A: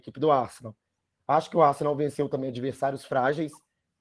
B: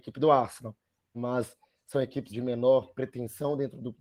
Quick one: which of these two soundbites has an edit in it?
B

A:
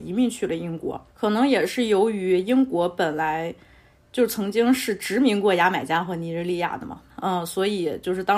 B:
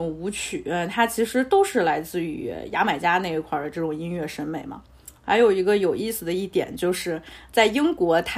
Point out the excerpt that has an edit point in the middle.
A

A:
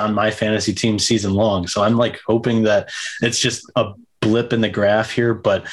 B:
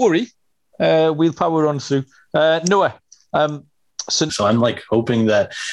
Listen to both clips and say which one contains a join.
B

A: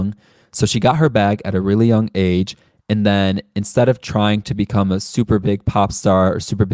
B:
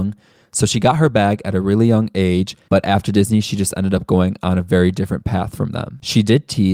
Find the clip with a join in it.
B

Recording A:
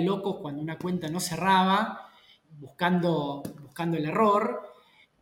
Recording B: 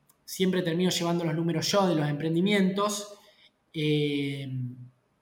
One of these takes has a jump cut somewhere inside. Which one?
A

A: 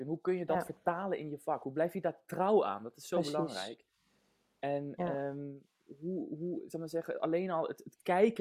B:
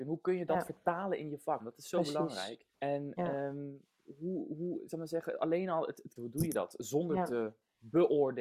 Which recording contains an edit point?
B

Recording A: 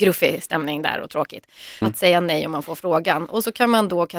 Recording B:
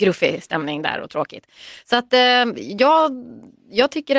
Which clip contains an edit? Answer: A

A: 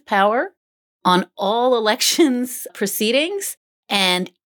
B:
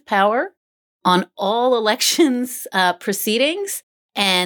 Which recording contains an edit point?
A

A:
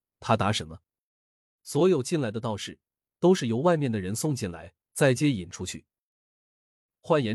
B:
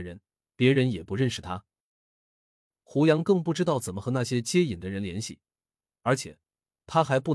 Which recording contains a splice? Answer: A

